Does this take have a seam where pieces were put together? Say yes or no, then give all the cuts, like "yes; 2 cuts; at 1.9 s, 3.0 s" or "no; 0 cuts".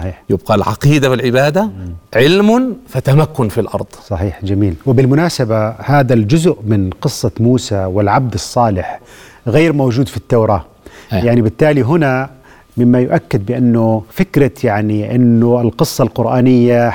yes; 2 cuts; at 2.1 s, 14.1 s